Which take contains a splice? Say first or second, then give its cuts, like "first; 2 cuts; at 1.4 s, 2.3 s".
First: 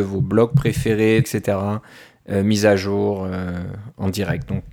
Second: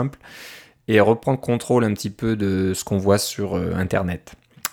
first; 1 cut; at 1.2 s